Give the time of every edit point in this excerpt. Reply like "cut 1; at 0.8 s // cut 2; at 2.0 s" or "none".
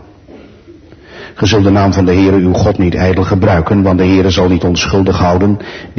none